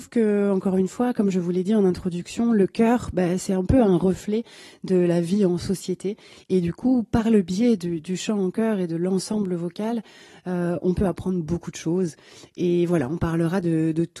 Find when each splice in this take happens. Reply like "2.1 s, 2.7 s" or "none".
none